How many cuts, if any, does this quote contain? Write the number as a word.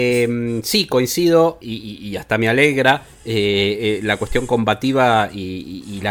one